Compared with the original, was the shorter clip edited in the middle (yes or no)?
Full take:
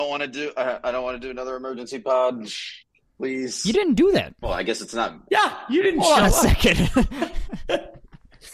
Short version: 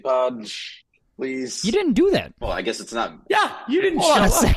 no